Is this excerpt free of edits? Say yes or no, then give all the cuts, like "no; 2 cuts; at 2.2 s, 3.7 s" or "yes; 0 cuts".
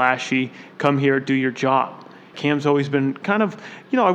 no; 1 cut; at 2.3 s